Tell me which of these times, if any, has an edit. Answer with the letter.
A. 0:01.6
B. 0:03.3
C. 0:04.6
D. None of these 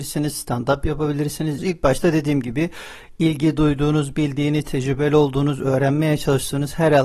A